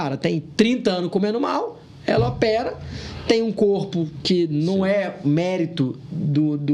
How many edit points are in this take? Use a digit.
0